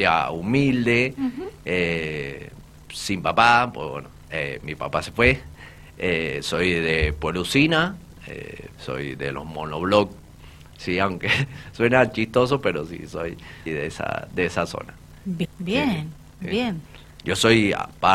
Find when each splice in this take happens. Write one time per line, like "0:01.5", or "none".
0:08.8
0:13.7
0:15.4